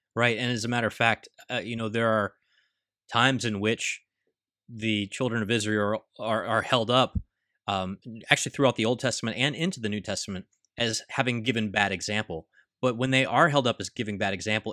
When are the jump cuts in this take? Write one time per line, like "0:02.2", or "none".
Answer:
none